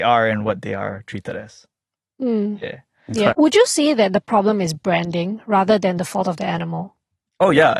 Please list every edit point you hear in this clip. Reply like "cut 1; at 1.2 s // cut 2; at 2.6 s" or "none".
cut 1; at 3.3 s